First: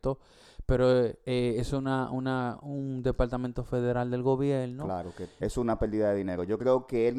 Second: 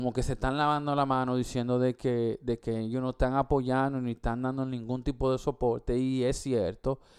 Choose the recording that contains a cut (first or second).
first